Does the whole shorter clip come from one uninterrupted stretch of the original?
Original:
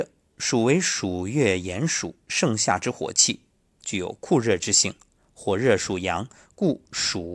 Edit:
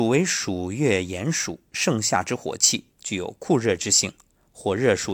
no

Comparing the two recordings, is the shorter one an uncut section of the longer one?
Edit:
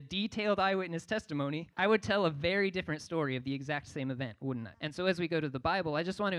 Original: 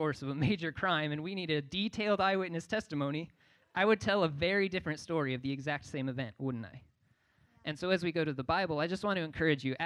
no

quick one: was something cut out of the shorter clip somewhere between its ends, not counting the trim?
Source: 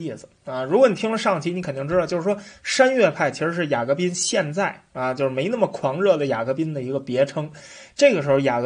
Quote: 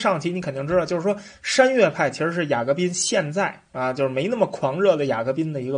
no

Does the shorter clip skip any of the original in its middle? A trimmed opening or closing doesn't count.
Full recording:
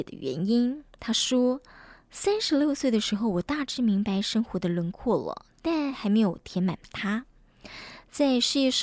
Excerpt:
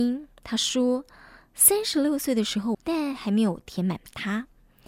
yes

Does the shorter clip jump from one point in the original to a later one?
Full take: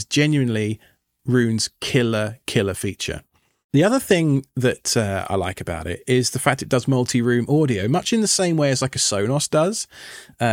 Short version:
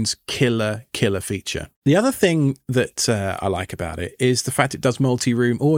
yes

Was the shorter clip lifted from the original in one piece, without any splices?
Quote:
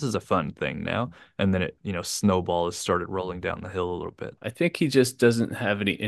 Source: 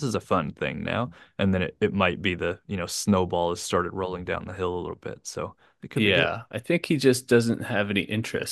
no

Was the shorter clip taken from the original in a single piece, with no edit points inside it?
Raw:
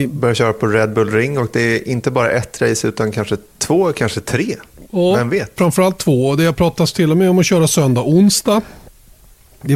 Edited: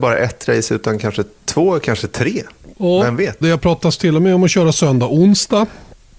no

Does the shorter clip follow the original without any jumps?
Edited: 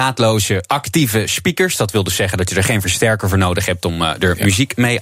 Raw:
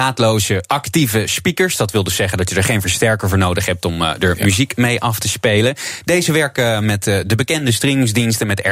yes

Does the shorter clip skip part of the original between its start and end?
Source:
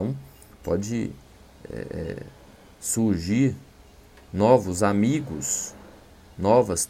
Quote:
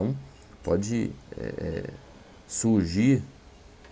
yes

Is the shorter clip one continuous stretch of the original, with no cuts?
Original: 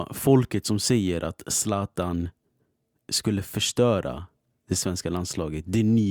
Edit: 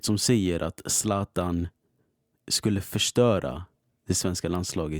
yes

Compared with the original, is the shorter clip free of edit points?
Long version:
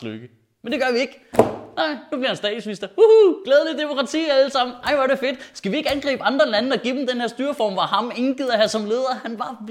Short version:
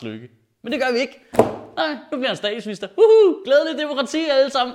yes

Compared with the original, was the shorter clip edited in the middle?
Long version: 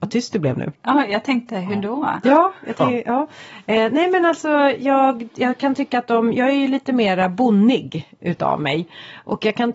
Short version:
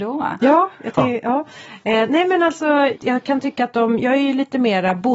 yes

